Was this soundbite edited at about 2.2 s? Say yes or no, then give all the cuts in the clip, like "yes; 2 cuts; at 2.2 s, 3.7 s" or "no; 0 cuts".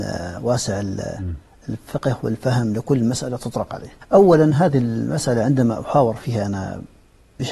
no; 1 cut; at 4.0 s